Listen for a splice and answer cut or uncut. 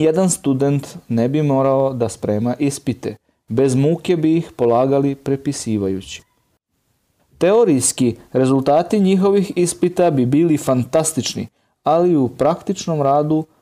uncut